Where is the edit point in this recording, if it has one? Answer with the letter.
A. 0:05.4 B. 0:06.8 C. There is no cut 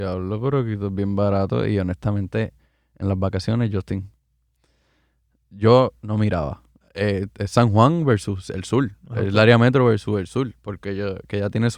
B